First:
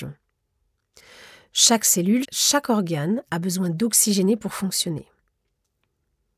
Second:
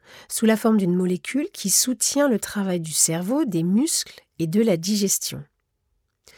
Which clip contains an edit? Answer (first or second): first